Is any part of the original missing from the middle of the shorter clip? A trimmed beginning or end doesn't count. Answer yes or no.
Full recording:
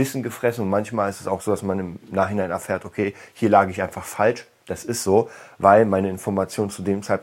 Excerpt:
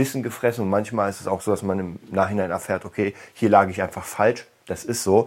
no